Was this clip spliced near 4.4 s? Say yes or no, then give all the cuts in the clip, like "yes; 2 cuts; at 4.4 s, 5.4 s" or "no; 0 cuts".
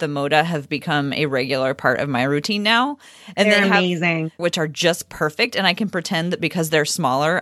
yes; 1 cut; at 4.4 s